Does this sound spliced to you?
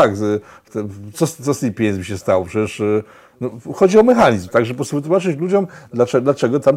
no; 0 cuts

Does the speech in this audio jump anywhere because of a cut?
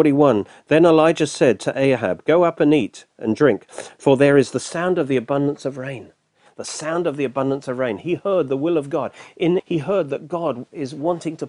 yes; 2 cuts; at 6.5 s, 9.6 s

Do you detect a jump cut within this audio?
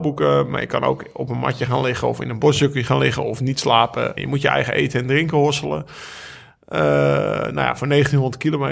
yes; 1 cut; at 4.2 s

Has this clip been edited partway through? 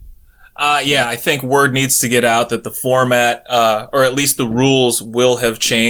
no; 0 cuts

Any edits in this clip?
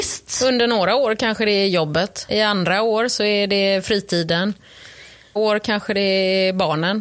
yes; 2 cuts; at 2.3 s, 5.4 s

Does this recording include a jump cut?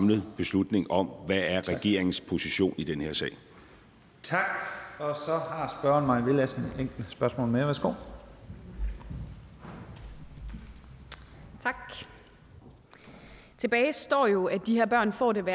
no; 0 cuts

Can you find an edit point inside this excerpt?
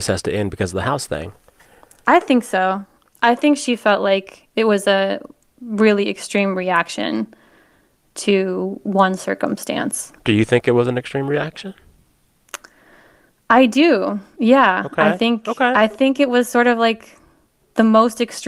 no; 0 cuts

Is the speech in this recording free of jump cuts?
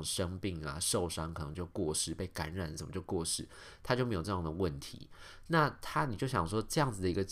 yes; 0 cuts

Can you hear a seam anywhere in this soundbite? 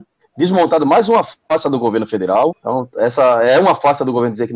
yes; 1 cut; at 2.5 s

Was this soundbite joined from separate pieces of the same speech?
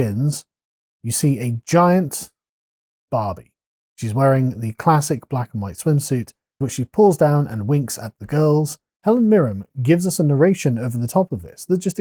yes; 2 cuts; at 6.6 s, 9.0 s

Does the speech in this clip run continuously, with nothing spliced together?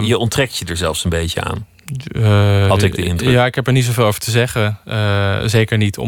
yes; 0 cuts

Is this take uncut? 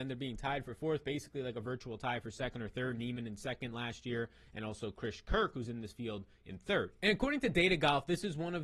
yes; 0 cuts

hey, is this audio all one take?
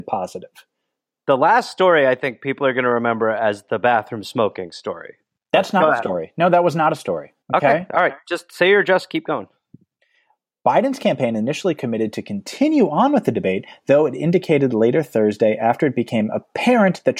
no; 1 cut; at 7.4 s

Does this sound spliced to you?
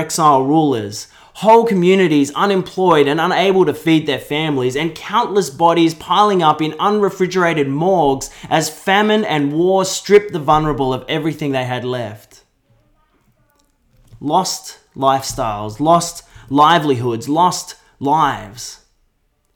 no; 0 cuts

